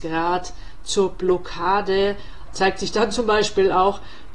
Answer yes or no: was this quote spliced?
yes